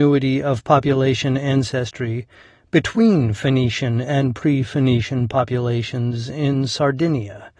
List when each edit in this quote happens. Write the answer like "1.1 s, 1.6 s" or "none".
none